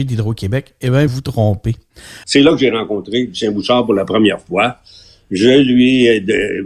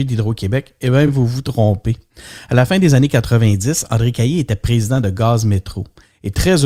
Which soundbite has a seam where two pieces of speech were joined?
first; 2 cuts; at 1.1 s, 2.2 s

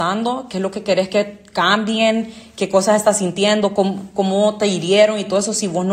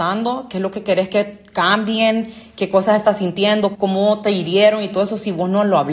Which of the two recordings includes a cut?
second; 1 cut; at 3.7 s

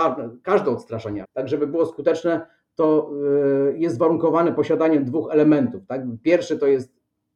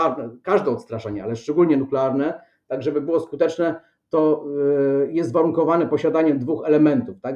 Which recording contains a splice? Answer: first; 1 cut; at 1.2 s

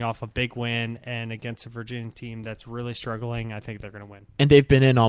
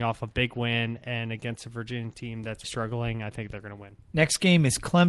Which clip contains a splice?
second; 2 cuts; at 2.6 s, 4.0 s

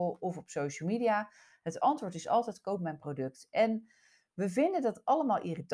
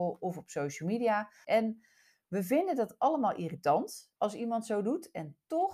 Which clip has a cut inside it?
second; 2 cuts; at 1.4 s, 4.2 s

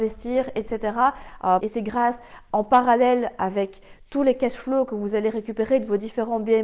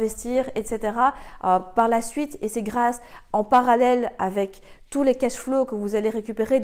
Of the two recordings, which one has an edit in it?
first; 1 cut; at 1.6 s

